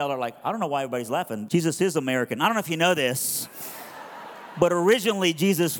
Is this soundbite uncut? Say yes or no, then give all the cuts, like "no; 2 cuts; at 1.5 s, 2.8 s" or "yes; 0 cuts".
no; 1 cut; at 1.5 s